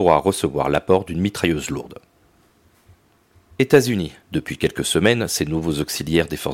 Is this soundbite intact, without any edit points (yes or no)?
no